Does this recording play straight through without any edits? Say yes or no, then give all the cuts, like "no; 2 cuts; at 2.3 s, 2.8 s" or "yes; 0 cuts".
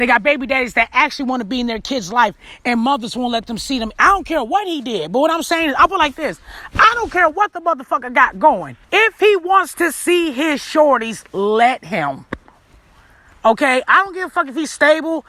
no; 2 cuts; at 4.0 s, 8.8 s